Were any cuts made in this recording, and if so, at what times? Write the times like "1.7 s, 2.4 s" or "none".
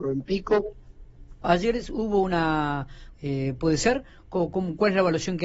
1.4 s, 3.1 s